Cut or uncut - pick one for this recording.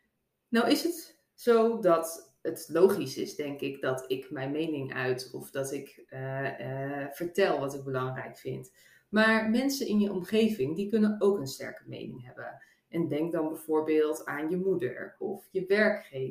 uncut